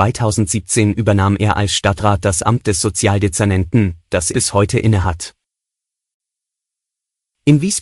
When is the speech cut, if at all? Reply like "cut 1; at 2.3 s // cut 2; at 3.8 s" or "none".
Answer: cut 1; at 4.3 s